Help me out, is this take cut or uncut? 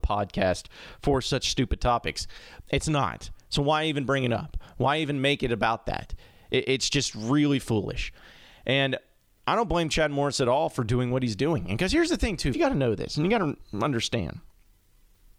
cut